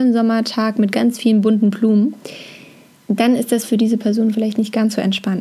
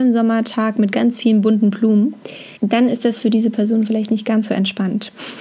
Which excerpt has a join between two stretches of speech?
second; 1 cut; at 2.6 s

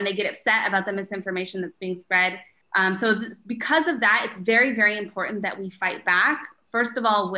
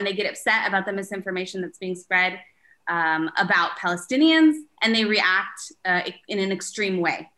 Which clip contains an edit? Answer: first; 1 cut; at 2.6 s

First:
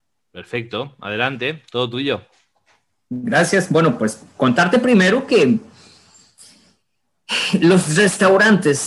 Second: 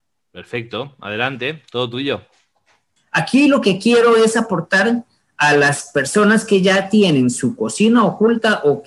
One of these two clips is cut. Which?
second; 1 cut; at 3.0 s

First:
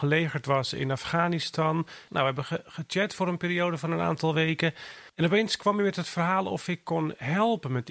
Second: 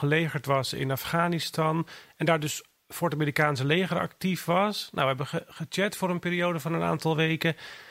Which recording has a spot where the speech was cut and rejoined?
first; 2 cuts; at 2.1 s, 5.1 s

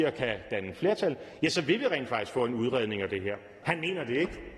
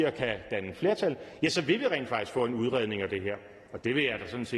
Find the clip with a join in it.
first; 1 cut; at 3.6 s

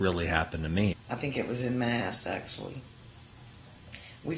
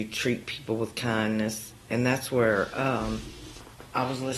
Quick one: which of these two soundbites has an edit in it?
first; 1 cut; at 0.9 s

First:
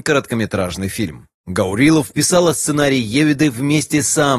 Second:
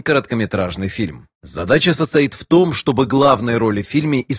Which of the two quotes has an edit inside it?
second; 1 cut; at 1.3 s

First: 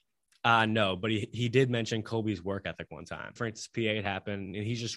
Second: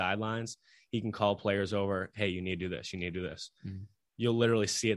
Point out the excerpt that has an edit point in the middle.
first; 1 cut; at 3.4 s

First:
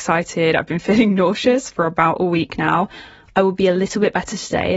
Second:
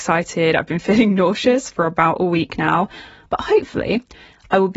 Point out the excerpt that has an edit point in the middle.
first; 1 cut; at 3.3 s

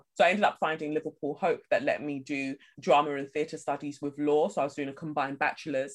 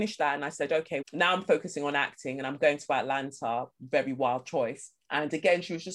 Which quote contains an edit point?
second; 1 cut; at 1.0 s

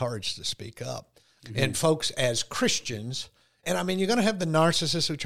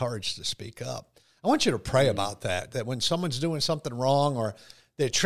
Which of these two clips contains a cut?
first; 2 cuts; at 1.4 s, 3.6 s

